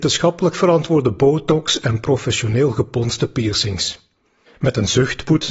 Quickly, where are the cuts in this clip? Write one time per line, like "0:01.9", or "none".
0:04.5